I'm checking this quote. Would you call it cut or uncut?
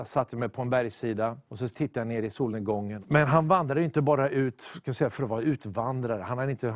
cut